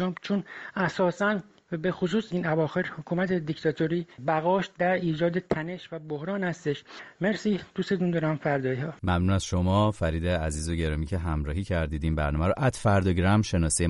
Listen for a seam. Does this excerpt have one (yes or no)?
yes